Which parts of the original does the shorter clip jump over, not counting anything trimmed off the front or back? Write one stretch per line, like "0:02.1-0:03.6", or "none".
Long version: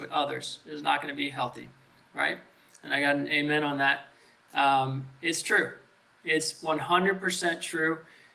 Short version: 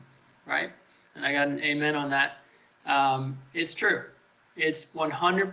none